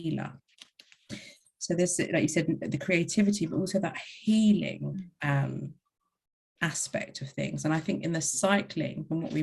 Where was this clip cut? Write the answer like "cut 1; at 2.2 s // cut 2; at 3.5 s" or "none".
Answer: none